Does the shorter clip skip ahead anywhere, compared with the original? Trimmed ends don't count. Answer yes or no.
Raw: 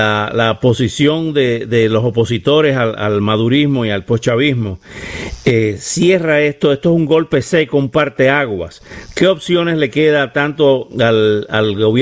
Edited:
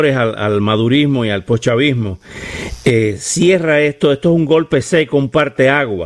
no